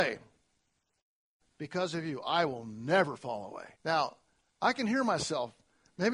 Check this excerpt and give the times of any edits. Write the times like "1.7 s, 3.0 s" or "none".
3.8 s